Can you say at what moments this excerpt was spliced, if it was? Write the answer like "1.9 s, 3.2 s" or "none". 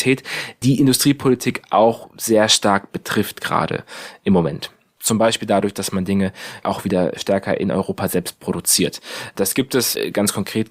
5.0 s